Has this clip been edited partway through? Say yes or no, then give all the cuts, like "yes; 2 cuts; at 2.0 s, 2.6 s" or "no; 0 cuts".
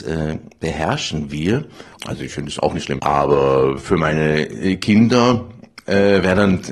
yes; 2 cuts; at 2.0 s, 3.0 s